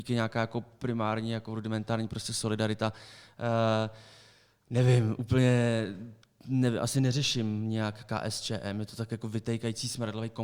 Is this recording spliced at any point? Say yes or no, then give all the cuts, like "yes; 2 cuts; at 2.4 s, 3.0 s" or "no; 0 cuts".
no; 0 cuts